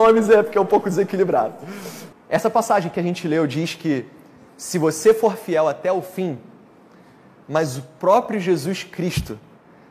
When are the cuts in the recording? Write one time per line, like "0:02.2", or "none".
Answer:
0:02.1
0:07.4